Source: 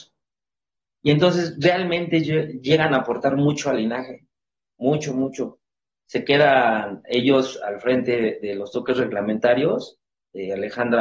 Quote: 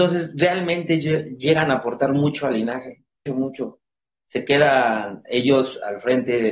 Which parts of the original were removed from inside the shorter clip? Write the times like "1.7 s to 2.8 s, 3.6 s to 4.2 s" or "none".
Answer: 4.5 s to 5.1 s